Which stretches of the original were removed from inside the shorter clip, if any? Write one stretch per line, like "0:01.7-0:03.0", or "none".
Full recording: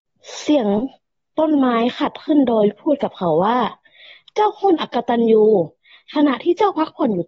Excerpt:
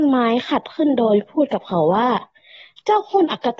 none